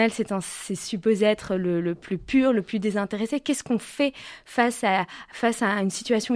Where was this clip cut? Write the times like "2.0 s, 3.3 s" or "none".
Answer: none